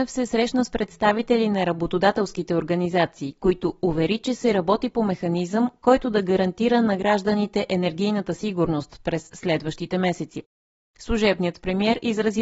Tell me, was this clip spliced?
no; 0 cuts

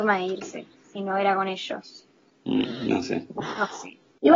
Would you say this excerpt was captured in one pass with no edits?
yes; 0 cuts

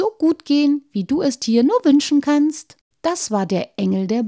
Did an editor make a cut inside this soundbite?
yes; 1 cut; at 2.9 s

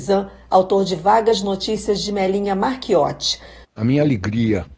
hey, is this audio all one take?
no; 1 cut; at 3.6 s

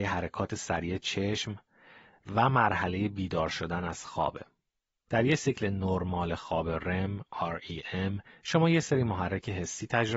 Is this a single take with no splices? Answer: yes; 0 cuts

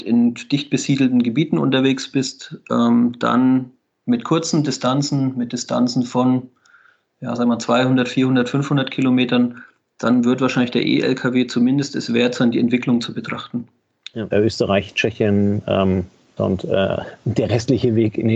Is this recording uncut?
no; 2 cuts; at 14.3 s, 16.4 s

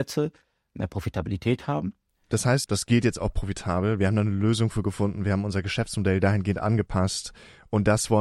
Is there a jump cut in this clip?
yes; 1 cut; at 2.6 s

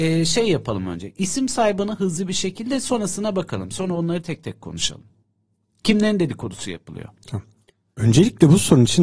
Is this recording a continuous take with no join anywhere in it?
yes; 0 cuts

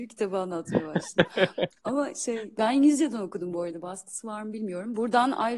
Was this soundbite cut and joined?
no; 0 cuts

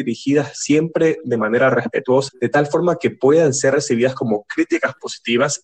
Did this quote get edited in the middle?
yes; 1 cut; at 2.3 s

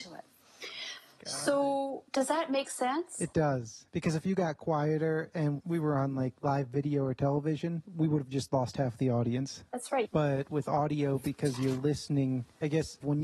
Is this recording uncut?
no; 1 cut; at 10.0 s

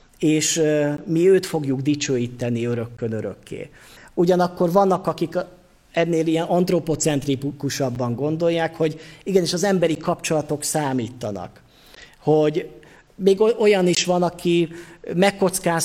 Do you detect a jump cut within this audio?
yes; 1 cut; at 4.0 s

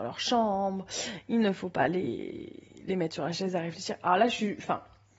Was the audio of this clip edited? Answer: no; 0 cuts

